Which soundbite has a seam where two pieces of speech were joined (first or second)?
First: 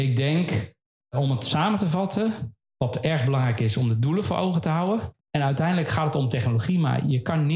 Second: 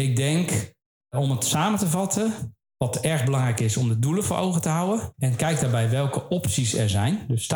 first